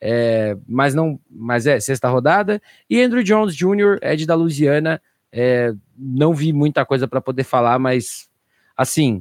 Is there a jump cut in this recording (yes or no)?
no